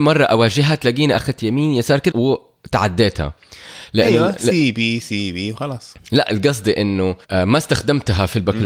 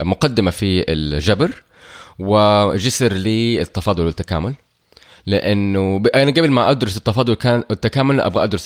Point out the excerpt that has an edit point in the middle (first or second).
first